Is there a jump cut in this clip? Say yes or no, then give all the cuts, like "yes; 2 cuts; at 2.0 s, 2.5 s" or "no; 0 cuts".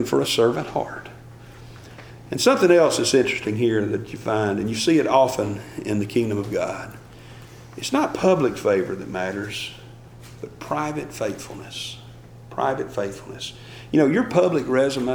no; 0 cuts